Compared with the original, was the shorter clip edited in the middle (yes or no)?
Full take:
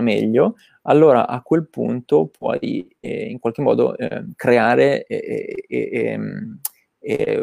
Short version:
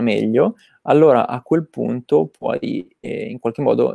no